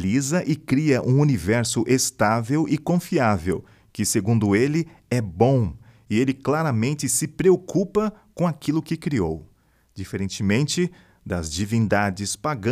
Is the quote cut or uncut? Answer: uncut